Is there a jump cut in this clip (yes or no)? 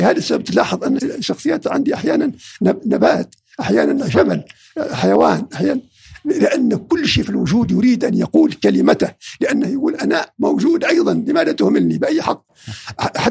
yes